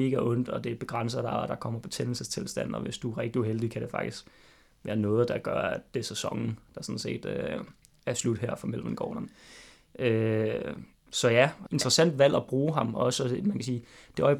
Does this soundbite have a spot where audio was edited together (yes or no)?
yes